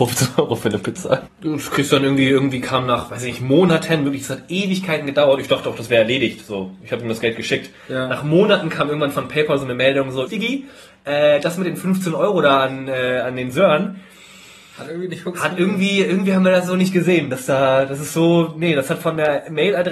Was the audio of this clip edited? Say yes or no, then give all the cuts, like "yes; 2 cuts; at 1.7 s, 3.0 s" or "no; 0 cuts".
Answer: yes; 2 cuts; at 1.3 s, 10.3 s